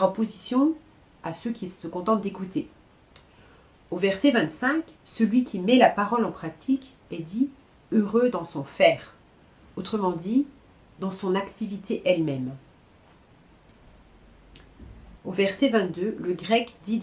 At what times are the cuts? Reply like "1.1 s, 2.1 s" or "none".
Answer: 5.0 s, 15.2 s